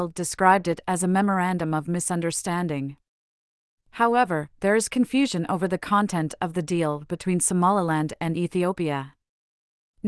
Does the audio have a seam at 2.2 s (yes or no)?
no